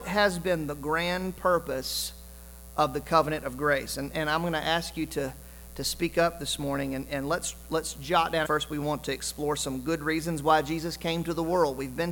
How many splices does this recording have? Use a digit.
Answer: 1